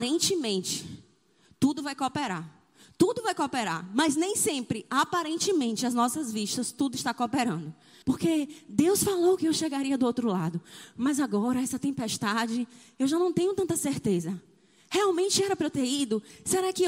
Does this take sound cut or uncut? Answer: cut